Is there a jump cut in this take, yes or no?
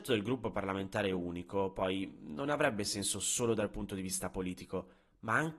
no